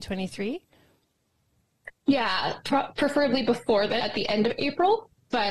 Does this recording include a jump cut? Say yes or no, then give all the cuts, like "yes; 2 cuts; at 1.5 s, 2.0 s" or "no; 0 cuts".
yes; 1 cut; at 4.0 s